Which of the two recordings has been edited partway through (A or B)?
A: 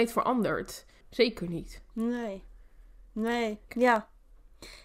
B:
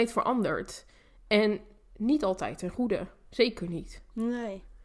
A